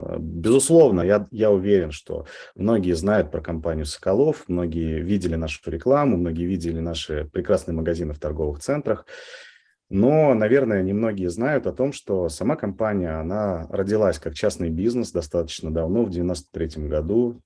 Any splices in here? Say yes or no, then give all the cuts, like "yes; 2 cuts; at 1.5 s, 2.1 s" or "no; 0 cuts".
no; 0 cuts